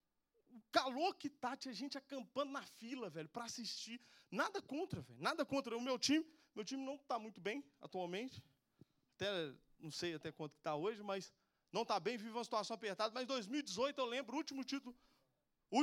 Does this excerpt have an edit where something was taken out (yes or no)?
no